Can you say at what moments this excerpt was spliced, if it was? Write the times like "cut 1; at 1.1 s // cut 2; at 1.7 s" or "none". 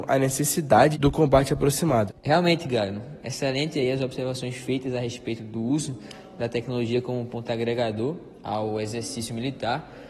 cut 1; at 0.9 s // cut 2; at 2.1 s